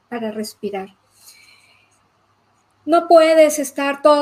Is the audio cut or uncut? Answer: uncut